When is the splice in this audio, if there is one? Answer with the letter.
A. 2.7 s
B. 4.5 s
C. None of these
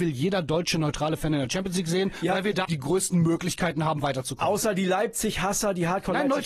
A